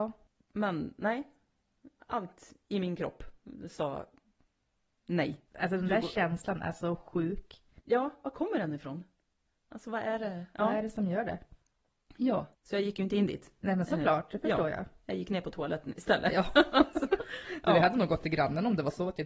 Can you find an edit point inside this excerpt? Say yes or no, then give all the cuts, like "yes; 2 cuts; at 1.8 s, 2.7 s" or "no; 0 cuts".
yes; 2 cuts; at 5.5 s, 12.5 s